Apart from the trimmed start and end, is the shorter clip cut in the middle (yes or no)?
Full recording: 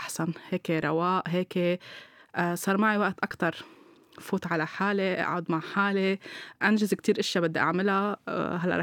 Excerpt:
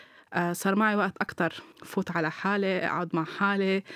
yes